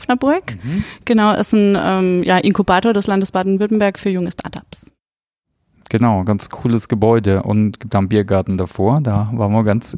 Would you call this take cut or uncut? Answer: uncut